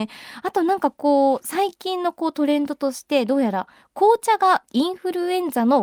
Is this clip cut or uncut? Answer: uncut